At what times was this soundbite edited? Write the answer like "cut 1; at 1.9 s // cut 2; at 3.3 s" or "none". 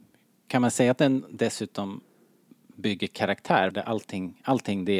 cut 1; at 3.7 s